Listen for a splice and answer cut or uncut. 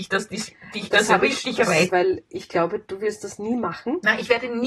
cut